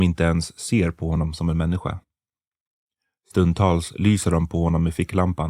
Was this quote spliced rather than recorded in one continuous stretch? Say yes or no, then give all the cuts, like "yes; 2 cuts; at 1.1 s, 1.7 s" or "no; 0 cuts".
no; 0 cuts